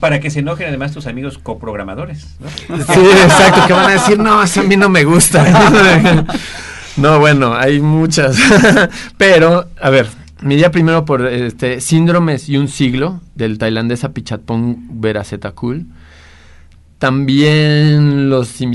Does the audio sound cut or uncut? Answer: uncut